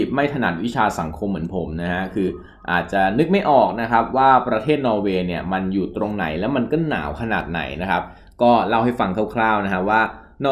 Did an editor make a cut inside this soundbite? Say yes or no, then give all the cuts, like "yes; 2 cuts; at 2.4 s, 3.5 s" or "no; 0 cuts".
no; 0 cuts